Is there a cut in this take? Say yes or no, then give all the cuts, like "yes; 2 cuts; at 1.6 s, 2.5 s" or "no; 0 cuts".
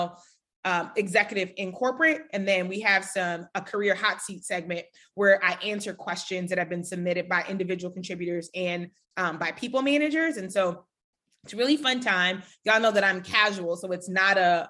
no; 0 cuts